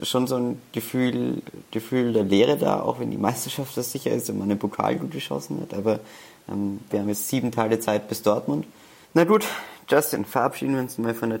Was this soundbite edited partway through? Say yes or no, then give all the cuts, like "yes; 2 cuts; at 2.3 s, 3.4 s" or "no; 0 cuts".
yes; 2 cuts; at 6.9 s, 9.0 s